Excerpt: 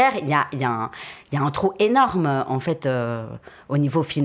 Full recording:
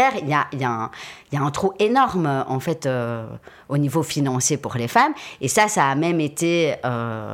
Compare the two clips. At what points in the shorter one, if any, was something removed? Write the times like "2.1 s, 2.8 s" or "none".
none